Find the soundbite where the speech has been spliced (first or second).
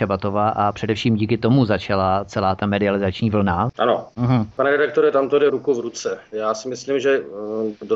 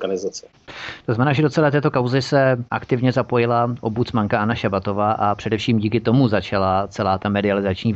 first